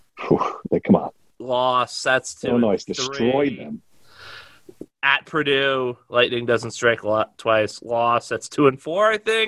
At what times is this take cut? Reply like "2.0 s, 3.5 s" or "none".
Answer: none